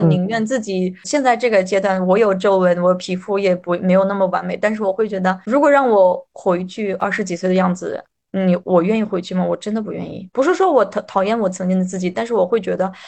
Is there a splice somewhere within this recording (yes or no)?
no